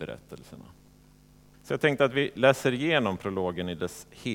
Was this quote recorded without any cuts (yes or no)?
no